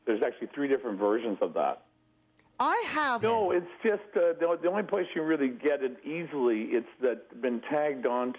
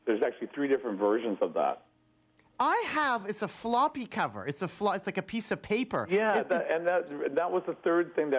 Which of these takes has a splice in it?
first; 1 cut; at 3.2 s

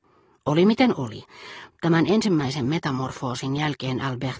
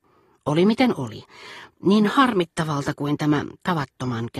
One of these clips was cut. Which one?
second; 1 cut; at 1.7 s

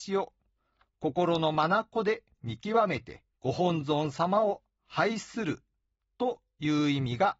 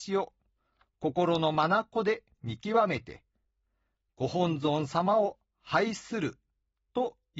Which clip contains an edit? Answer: first; 1 cut; at 3.3 s

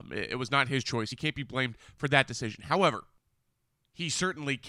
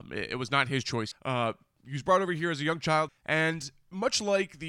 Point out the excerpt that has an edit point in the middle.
second; 2 cuts; at 1.1 s, 3.1 s

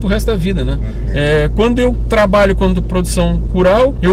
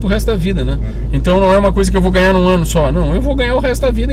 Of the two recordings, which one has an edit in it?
first; 1 cut; at 1.1 s

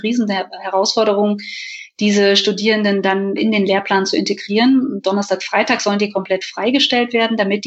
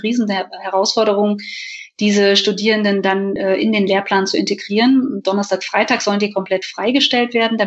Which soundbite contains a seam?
first; 1 cut; at 3.4 s

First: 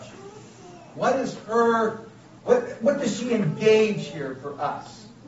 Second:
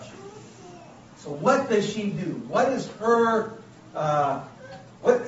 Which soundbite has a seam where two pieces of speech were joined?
first; 2 cuts; at 0.9 s, 2.4 s

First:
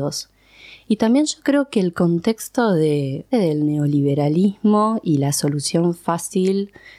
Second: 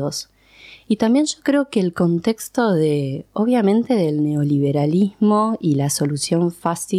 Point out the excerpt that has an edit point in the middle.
first; 1 cut; at 3.3 s

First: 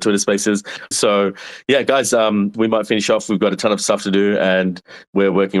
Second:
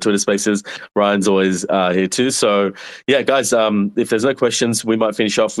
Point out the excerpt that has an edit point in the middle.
first; 2 cuts; at 0.9 s, 2.5 s

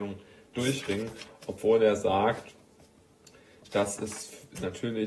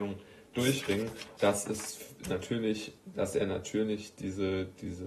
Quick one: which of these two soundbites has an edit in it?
second; 2 cuts; at 1.4 s, 3.1 s

